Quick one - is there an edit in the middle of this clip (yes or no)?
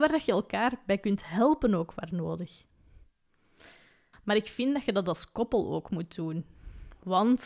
yes